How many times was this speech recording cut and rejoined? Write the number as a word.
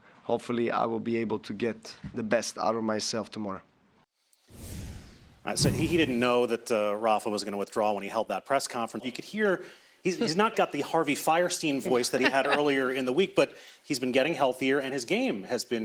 two